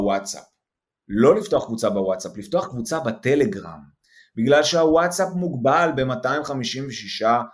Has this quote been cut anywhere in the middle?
no; 0 cuts

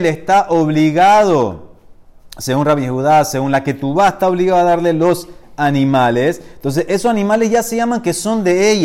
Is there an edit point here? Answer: no; 0 cuts

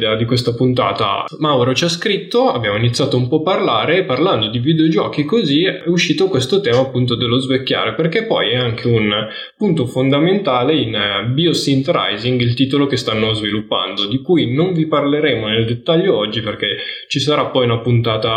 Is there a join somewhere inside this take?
no; 0 cuts

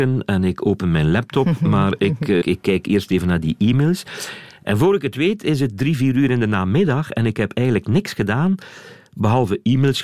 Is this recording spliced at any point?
yes; 1 cut; at 2.4 s

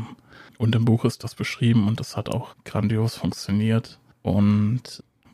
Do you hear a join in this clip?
no; 0 cuts

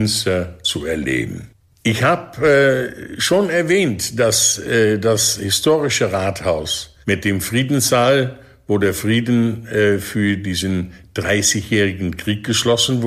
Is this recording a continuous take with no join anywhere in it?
no; 1 cut; at 7.0 s

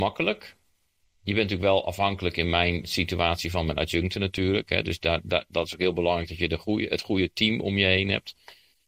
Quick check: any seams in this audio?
no; 0 cuts

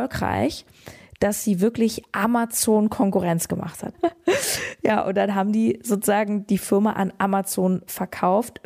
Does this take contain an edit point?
yes; 1 cut; at 3.9 s

